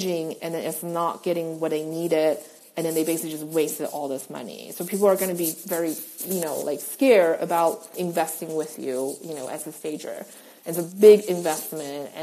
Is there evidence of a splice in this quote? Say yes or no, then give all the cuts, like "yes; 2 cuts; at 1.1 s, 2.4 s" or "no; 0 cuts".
yes; 1 cut; at 10.6 s